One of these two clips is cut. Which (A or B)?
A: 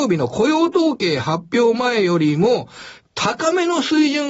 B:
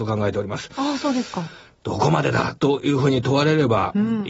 B